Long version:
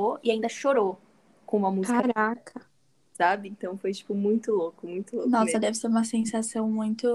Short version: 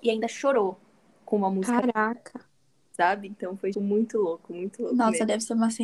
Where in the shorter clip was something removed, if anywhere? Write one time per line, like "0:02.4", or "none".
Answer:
0:03.7